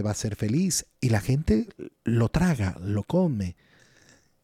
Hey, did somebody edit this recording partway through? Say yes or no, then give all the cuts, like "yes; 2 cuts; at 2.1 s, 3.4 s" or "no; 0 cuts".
yes; 1 cut; at 0.9 s